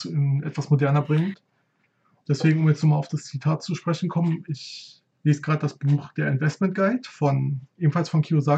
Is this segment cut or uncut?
cut